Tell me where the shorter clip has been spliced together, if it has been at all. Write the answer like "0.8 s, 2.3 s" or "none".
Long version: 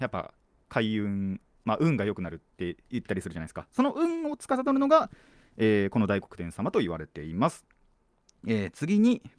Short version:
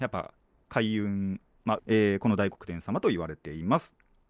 1.8 s